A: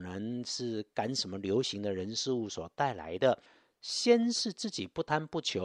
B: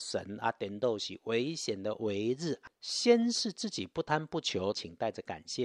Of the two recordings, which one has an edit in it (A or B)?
B